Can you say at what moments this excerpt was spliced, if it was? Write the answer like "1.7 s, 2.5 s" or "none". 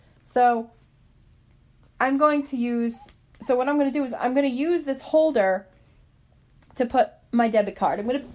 none